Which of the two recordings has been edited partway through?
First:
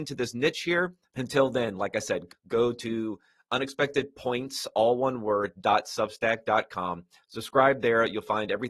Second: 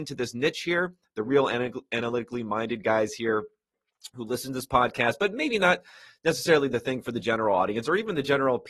first; 2 cuts; at 1.1 s, 2.3 s

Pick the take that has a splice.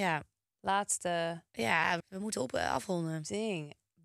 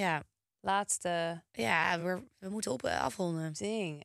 first; 1 cut; at 2.0 s

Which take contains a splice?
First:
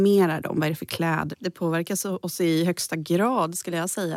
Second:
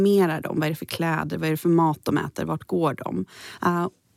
first; 1 cut; at 1.3 s

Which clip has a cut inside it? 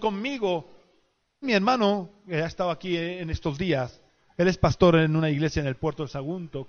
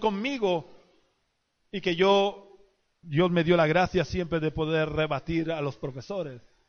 first; 1 cut; at 1.4 s

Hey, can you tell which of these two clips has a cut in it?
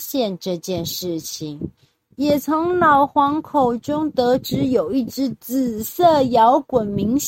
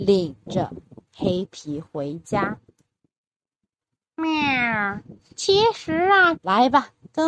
second; 1 cut; at 6.4 s

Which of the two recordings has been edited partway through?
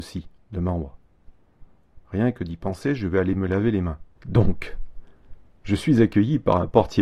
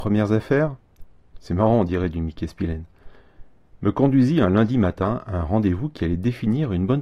first; 2 cuts; at 2.0 s, 4.2 s

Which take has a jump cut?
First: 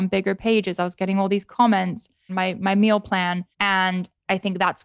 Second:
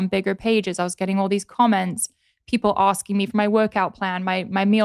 first; 2 cuts; at 2.3 s, 3.5 s

